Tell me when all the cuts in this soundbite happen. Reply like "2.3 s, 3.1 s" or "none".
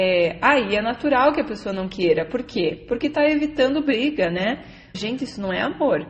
4.9 s